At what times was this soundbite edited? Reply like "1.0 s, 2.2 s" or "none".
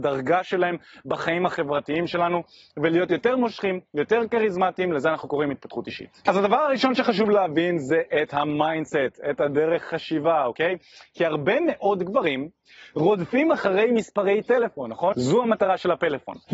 6.3 s, 15.1 s